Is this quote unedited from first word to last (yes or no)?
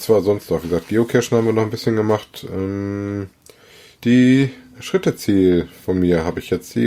yes